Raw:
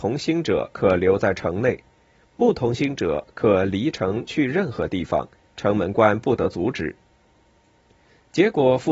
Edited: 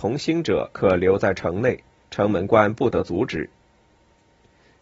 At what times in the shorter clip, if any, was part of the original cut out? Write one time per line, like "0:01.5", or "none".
0:02.0